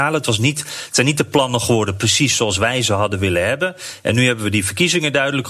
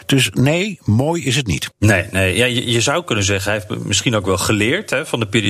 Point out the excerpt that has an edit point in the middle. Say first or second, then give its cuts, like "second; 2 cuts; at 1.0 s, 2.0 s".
second; 1 cut; at 1.7 s